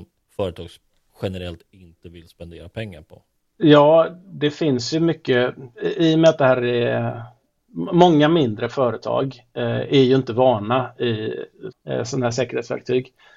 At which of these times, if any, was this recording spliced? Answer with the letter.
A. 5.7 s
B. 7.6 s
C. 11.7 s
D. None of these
C